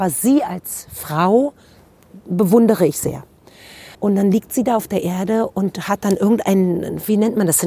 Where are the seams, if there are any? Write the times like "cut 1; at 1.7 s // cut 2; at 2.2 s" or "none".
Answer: cut 1; at 3.9 s